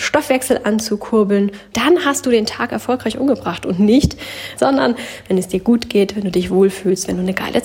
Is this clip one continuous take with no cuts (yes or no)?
no